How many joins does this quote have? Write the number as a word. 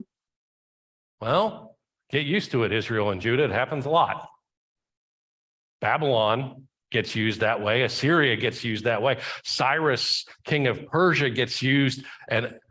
zero